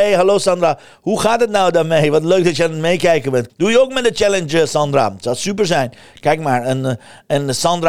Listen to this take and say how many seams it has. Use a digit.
1